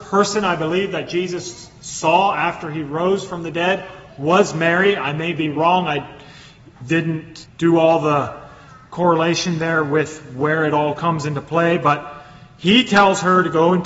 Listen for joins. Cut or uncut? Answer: cut